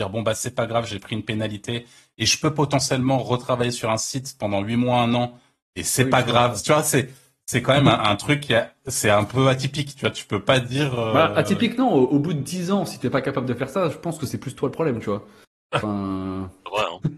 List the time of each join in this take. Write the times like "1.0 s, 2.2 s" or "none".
none